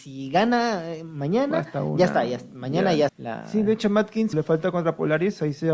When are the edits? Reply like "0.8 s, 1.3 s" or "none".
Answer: 3.1 s, 4.3 s